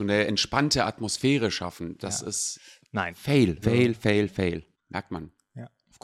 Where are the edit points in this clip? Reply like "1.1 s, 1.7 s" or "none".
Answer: 3.6 s, 4.7 s